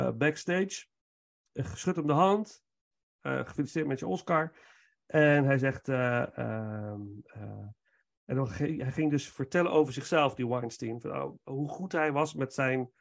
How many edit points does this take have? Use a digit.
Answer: 0